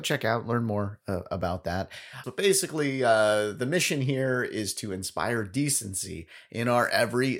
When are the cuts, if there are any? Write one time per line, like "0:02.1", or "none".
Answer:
0:02.2